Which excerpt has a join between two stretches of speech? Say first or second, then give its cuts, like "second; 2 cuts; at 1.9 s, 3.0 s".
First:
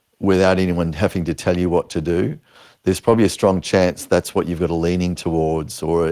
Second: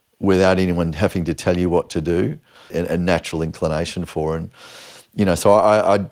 second; 1 cut; at 2.7 s